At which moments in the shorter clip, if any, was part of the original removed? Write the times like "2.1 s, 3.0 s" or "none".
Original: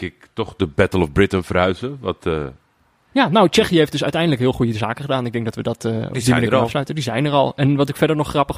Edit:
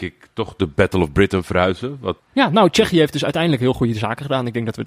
2.2 s

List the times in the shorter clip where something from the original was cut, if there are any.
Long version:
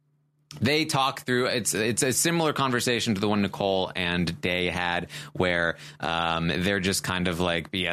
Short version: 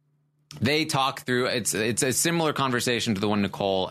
none

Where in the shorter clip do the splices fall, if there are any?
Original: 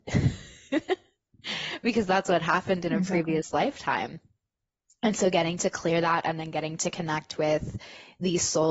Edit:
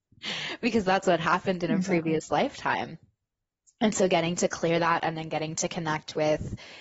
none

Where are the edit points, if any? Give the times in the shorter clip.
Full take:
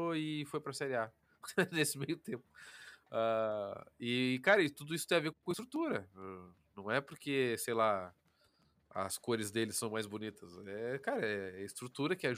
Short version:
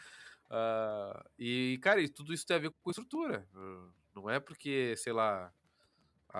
none

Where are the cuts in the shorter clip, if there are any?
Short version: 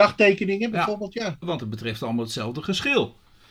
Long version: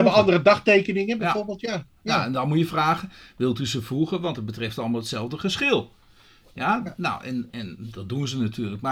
1.4 s

